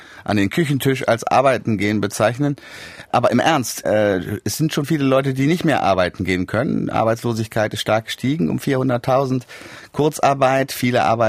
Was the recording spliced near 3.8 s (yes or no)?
yes